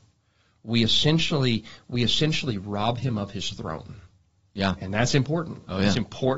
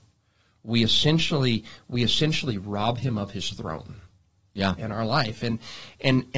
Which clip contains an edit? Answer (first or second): second